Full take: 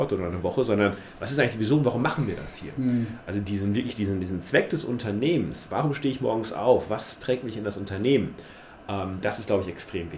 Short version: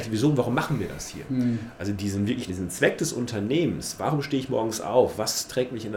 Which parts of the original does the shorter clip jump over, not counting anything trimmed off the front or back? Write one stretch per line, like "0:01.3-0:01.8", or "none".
0:03.9-0:04.2